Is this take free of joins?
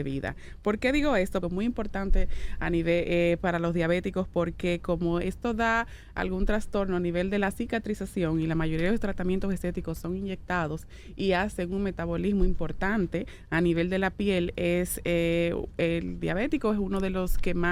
no; 1 cut; at 1.4 s

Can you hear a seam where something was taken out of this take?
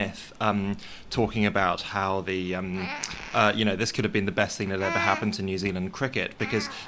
no; 0 cuts

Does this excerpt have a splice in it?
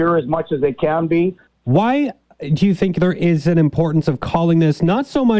yes; 1 cut; at 1.5 s

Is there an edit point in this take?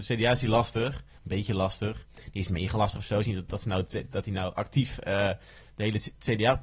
no; 0 cuts

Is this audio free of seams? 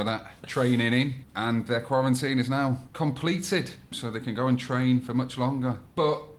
yes; 0 cuts

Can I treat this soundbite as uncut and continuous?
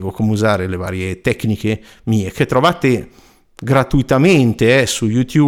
yes; 0 cuts

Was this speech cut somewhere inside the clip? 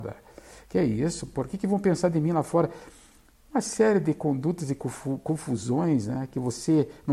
no; 0 cuts

